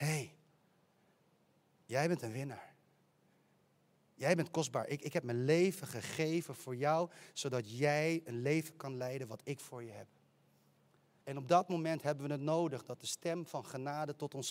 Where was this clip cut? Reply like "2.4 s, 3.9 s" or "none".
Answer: 11.2 s

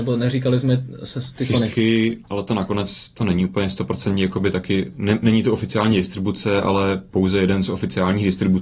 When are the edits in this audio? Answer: 1.7 s

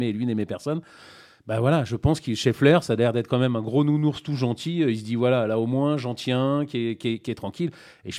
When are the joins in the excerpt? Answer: none

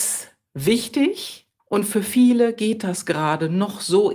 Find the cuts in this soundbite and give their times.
1.6 s

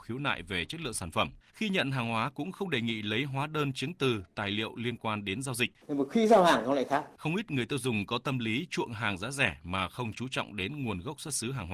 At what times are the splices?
1.4 s, 5.8 s, 7.2 s

